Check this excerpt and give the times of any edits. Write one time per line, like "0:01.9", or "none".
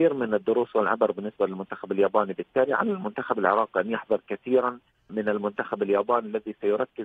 0:05.1

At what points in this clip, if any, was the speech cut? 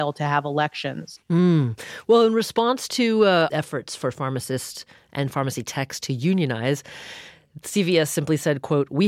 0:01.2
0:03.5

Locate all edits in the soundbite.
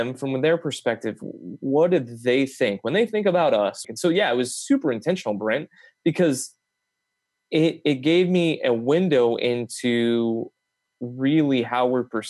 0:03.8

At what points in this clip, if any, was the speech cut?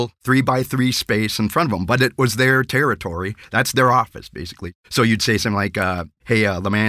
none

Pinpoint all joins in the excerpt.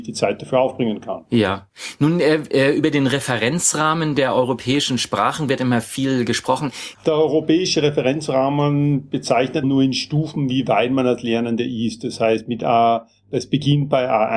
0:06.9
0:09.6

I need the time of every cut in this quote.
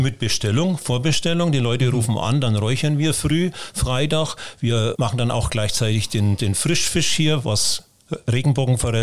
0:05.0

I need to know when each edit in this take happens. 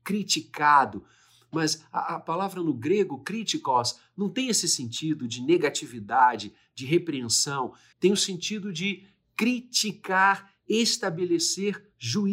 0:07.9

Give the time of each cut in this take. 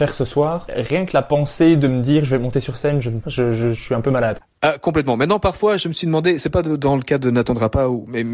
0:03.2

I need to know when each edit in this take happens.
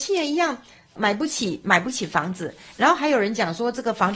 0:01.0

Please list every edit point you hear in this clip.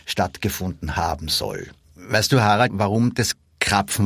0:02.7

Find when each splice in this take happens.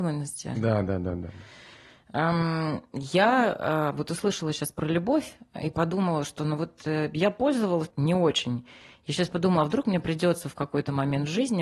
0:07.9

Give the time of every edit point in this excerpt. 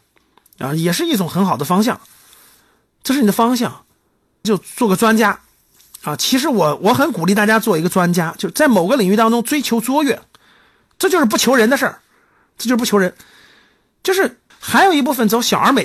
0:04.4
0:14.5

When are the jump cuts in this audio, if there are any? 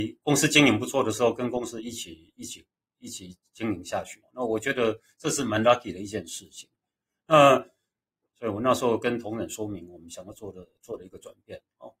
0:04.2
0:08.3

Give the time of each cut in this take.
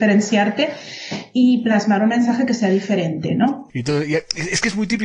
0:03.7

